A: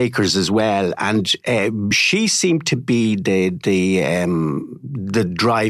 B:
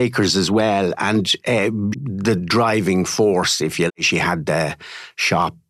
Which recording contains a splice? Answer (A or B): B